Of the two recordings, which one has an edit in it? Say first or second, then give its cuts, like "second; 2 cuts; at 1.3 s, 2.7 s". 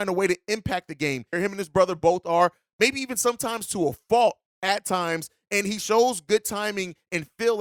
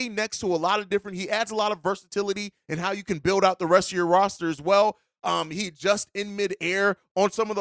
first; 1 cut; at 1.3 s